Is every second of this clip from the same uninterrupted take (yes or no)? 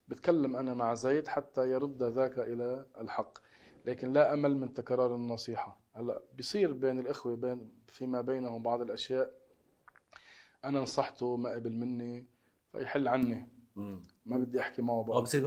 yes